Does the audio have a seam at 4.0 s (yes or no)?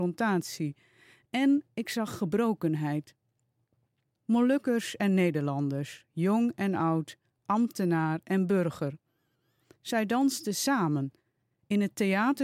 yes